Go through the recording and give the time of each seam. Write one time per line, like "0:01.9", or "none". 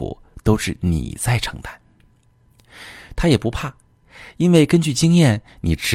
0:03.2